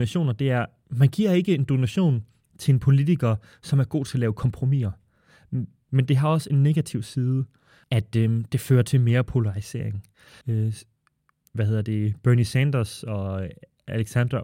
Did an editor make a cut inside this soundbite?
yes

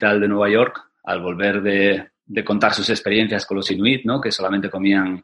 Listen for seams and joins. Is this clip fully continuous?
yes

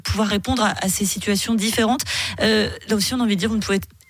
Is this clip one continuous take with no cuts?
yes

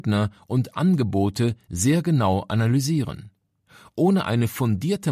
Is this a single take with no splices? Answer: yes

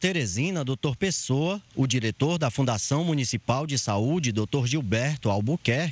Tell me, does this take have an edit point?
no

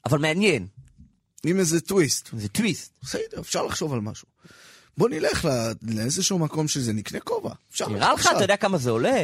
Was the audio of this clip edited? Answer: no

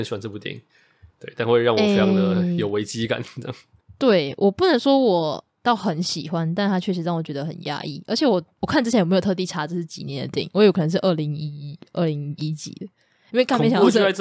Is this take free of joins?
yes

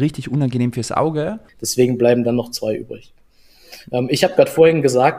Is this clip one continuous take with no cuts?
no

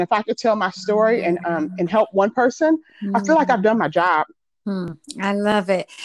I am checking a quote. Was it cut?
no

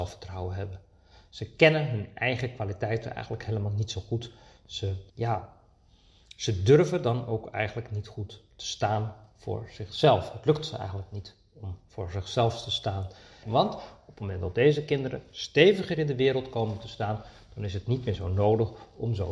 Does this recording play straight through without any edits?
no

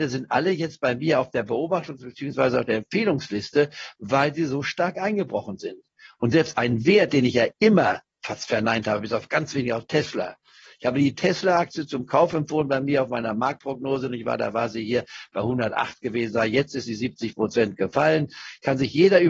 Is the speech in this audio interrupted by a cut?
no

